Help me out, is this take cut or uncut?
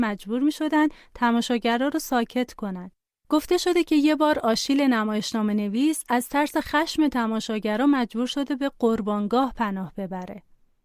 uncut